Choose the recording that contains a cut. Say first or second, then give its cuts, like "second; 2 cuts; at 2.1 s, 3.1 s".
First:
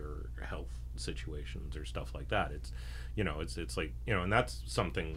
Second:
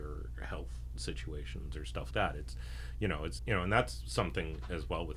second; 2 cuts; at 2.1 s, 3.4 s